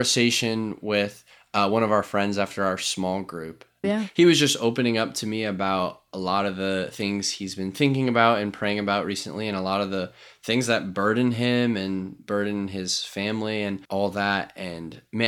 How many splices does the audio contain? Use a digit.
2